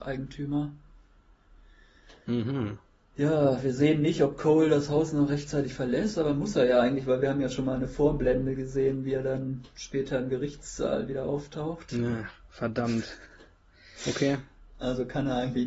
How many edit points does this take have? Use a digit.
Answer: 0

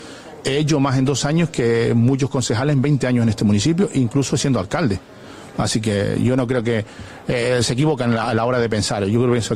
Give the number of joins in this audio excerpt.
0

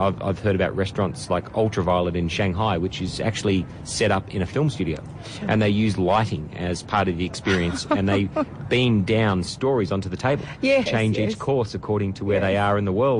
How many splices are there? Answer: 1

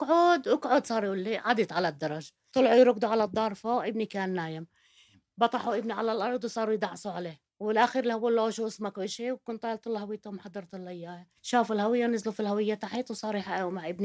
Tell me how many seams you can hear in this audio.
2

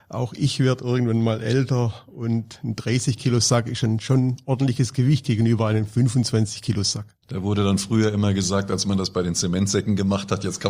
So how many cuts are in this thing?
1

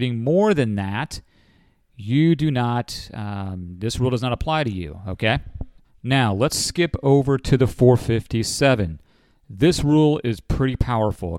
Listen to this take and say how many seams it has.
0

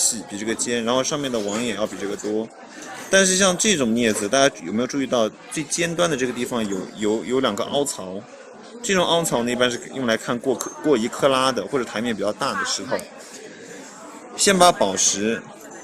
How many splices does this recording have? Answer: 0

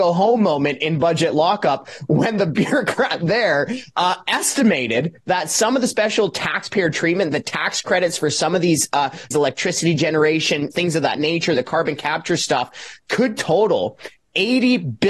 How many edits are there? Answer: 2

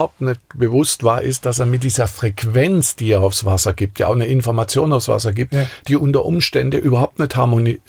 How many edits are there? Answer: 0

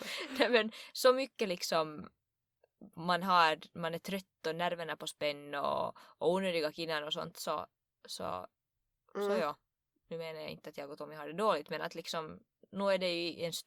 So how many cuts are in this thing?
0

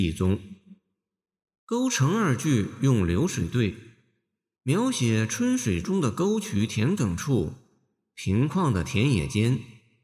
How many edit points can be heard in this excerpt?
1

